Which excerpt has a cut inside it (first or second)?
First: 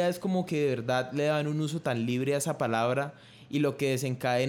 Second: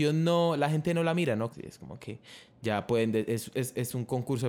second